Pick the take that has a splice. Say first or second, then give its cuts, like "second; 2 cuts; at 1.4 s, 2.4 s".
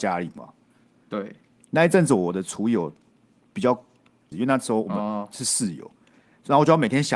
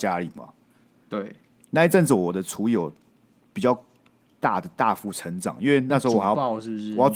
first; 1 cut; at 4.3 s